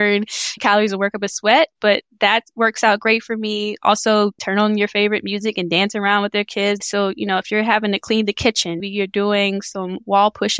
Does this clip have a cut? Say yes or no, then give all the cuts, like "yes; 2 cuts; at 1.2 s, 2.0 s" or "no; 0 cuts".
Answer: yes; 3 cuts; at 4.4 s, 6.8 s, 8.8 s